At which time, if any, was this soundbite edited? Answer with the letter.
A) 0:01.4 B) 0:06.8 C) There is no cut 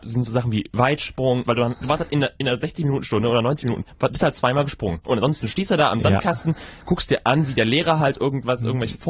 A